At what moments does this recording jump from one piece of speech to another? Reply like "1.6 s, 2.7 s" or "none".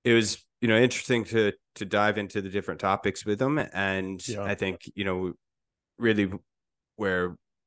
none